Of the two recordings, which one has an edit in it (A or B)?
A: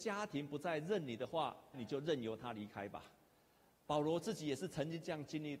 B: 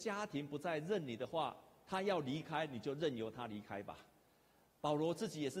A